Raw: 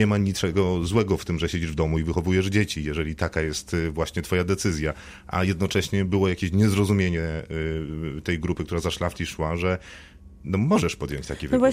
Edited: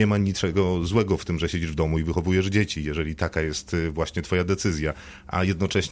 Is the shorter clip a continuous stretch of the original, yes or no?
yes